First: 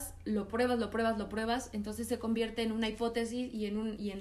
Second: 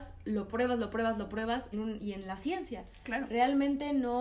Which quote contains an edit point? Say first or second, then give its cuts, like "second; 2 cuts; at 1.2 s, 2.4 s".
second; 1 cut; at 1.7 s